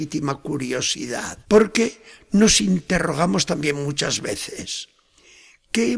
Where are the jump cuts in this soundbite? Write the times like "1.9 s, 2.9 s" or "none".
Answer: 1.4 s